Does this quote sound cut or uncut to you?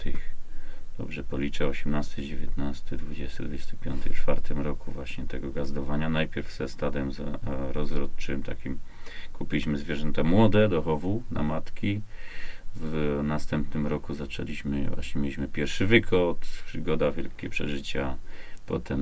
uncut